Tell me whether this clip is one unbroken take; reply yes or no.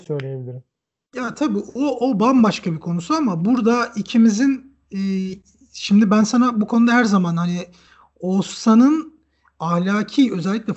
yes